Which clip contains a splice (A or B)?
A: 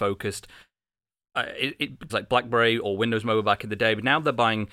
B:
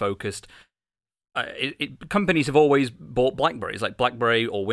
A